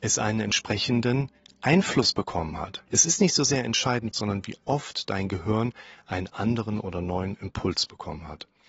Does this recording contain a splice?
yes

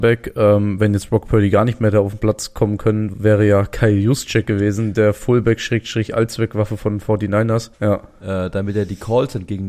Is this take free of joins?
no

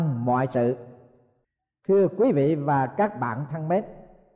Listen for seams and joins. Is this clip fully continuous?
yes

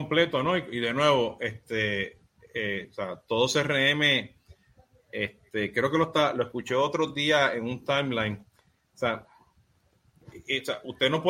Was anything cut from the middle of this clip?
no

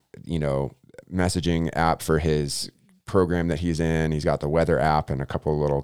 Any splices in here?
yes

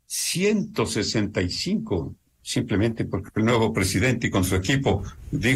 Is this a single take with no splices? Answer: no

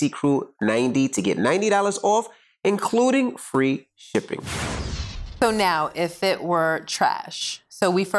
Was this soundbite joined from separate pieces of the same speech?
no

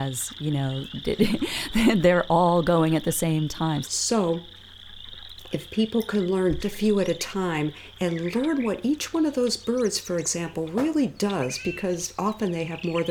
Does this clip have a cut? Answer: yes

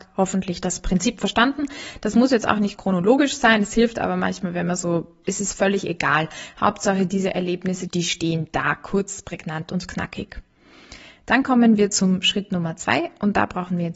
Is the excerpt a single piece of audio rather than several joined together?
no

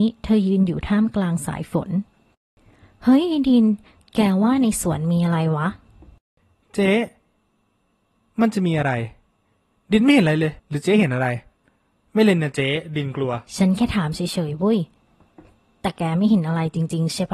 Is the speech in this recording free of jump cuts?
no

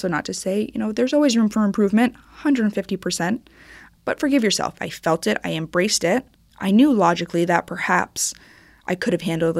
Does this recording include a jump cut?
yes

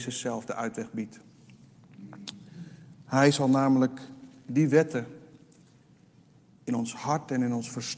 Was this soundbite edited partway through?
no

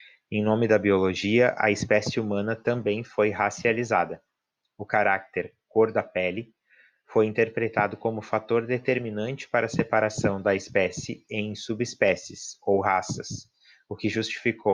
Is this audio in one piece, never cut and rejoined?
yes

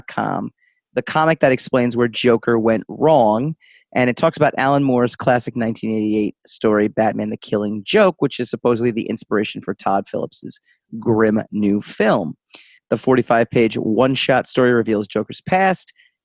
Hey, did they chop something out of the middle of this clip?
yes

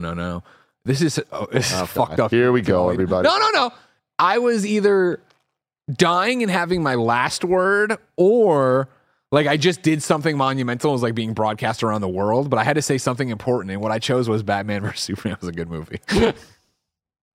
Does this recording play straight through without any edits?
yes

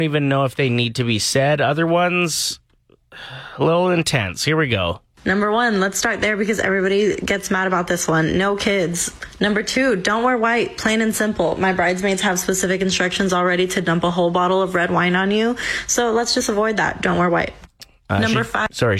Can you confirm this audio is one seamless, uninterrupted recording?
yes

